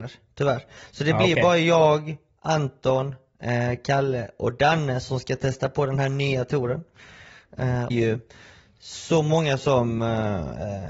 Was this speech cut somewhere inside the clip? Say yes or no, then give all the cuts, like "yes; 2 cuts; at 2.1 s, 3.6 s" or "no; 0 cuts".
yes; 1 cut; at 7.9 s